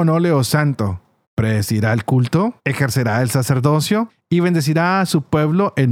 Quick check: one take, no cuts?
no; 2 cuts; at 1.2 s, 2.6 s

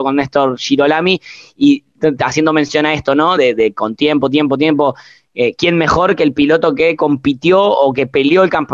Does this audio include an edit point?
no; 0 cuts

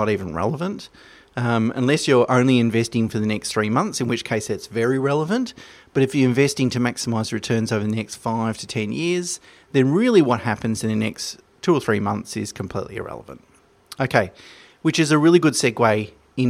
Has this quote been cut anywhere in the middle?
no; 0 cuts

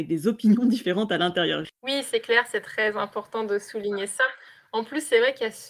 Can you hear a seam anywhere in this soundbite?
no; 0 cuts

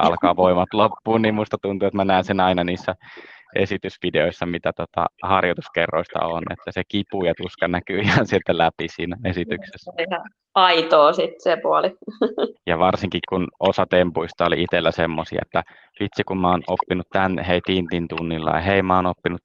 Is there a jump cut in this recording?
yes; 2 cuts; at 12.5 s, 15.4 s

